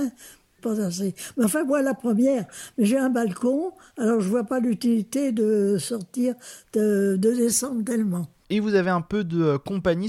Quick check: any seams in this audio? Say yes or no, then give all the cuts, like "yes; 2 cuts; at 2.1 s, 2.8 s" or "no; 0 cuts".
no; 0 cuts